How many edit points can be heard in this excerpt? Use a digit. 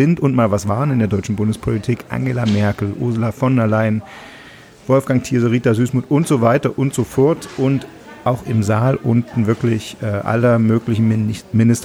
0